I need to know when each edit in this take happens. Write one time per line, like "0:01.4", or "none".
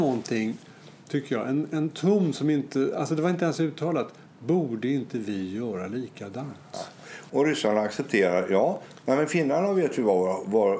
0:07.3